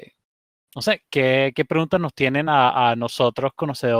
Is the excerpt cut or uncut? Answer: uncut